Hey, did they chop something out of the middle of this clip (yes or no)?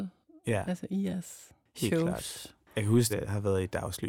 yes